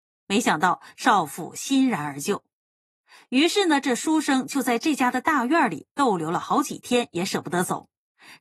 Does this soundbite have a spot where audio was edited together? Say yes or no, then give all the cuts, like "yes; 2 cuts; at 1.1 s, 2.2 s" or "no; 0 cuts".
no; 0 cuts